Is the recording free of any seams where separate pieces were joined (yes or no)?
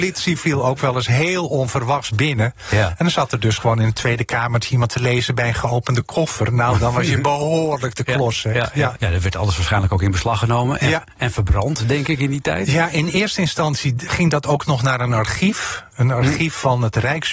no